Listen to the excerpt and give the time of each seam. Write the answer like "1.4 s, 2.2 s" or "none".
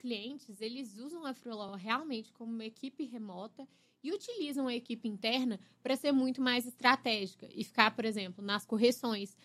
none